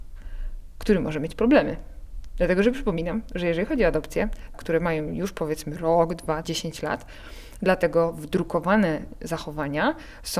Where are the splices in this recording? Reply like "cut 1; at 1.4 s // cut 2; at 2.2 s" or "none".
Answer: cut 1; at 4.5 s // cut 2; at 6.4 s